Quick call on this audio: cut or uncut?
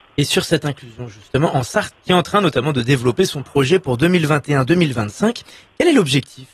cut